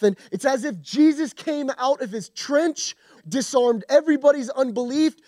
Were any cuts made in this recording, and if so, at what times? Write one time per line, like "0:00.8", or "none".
0:03.2